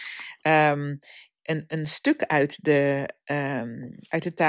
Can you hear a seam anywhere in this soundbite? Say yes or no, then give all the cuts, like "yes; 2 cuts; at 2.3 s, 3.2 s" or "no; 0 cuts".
no; 0 cuts